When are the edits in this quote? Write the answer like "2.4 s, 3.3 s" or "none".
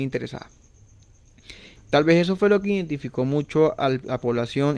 1.7 s